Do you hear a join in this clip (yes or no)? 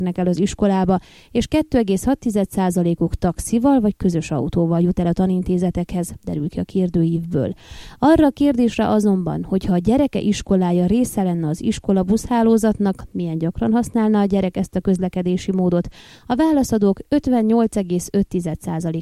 no